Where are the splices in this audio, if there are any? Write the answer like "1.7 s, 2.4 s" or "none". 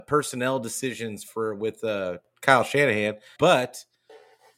3.4 s

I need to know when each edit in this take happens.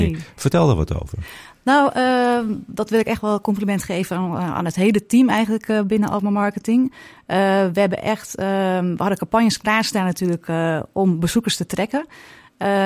none

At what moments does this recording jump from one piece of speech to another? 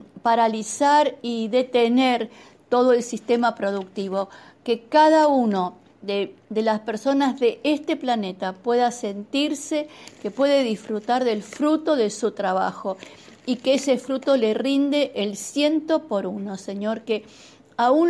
6.4 s

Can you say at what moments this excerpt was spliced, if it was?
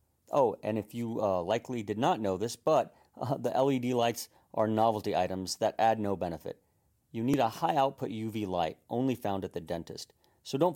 none

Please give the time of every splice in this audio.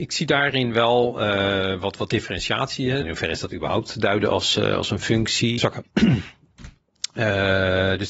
3.0 s, 5.6 s

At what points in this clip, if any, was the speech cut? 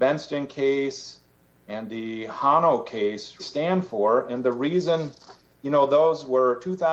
3.4 s

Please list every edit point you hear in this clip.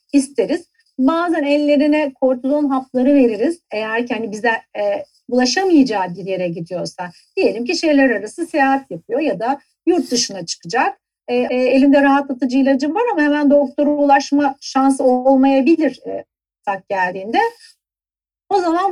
11.5 s

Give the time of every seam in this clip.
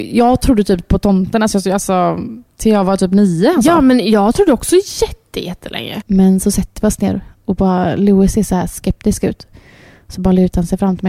6.0 s

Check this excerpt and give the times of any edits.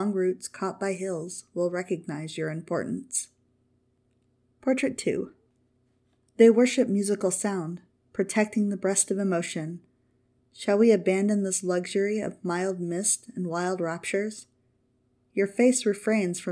10.4 s

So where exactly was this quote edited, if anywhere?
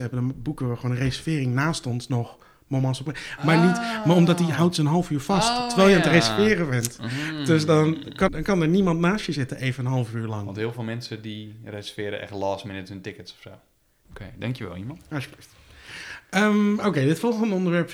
8.3 s, 14.1 s

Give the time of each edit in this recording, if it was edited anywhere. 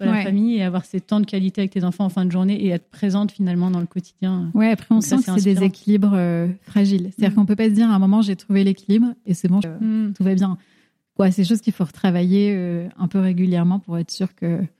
9.6 s

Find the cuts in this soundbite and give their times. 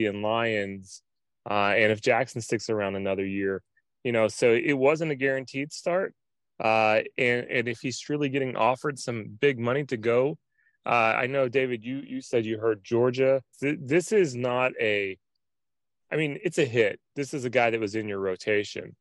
13.5 s

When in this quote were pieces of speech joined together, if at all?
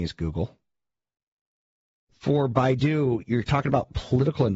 none

